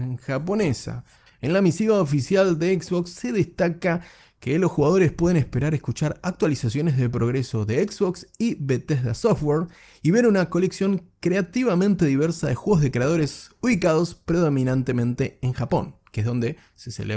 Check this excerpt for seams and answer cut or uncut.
cut